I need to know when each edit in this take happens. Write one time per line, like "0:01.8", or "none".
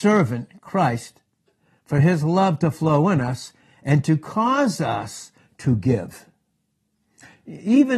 none